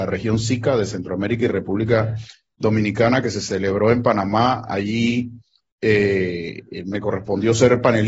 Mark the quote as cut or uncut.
uncut